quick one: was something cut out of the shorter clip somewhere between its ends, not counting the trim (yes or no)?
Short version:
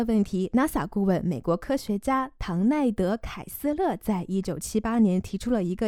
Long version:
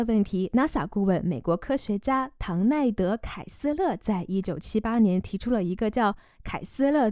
no